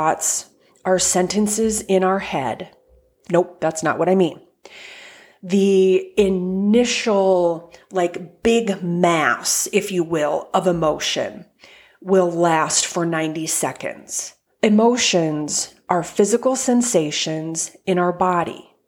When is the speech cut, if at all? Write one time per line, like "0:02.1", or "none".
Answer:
0:03.3
0:14.5